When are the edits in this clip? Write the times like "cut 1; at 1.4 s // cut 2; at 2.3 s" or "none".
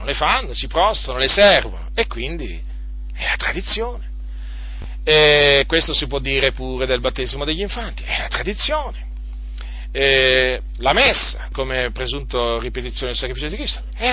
cut 1; at 11.5 s